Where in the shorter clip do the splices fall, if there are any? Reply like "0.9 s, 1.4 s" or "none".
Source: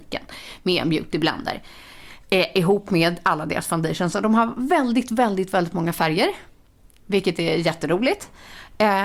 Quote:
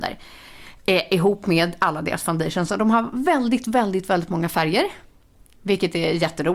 none